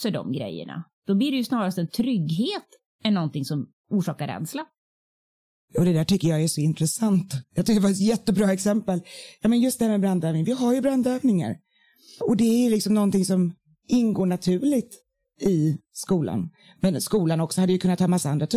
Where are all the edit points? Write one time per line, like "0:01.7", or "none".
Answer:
none